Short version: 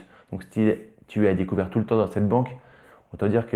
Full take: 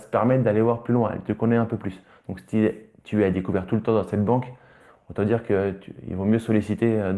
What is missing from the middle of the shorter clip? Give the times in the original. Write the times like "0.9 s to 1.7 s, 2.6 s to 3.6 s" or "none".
none